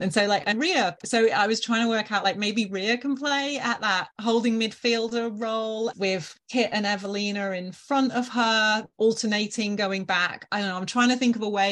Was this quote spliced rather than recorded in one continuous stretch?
no; 0 cuts

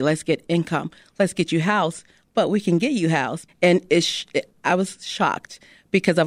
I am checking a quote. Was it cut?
yes; 1 cut; at 3.5 s

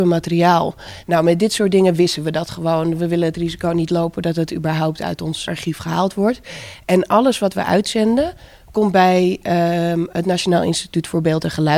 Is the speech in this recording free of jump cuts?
no; 1 cut; at 5.5 s

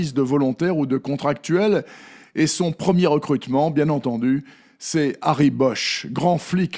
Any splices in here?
no; 0 cuts

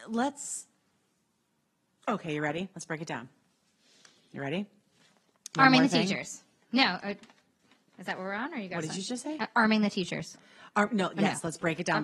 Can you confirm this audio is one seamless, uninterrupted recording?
yes; 0 cuts

